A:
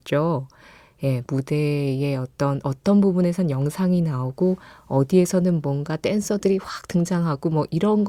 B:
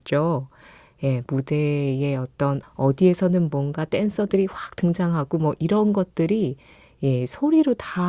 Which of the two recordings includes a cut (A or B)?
B